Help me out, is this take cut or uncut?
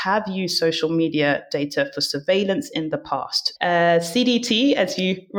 cut